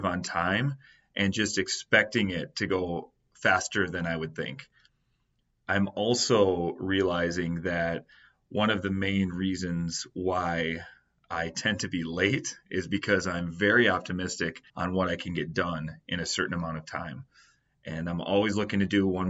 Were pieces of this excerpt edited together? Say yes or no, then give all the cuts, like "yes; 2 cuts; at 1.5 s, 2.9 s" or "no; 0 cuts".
yes; 1 cut; at 14.7 s